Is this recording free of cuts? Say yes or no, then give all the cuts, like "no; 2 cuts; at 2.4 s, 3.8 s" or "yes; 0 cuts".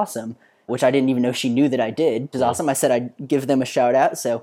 no; 1 cut; at 2.3 s